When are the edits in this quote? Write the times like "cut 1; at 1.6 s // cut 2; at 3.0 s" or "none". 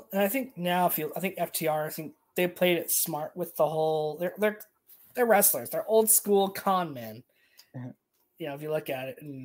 none